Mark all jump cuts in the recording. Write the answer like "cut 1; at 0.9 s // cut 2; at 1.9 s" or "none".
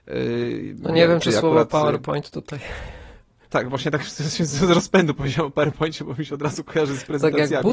none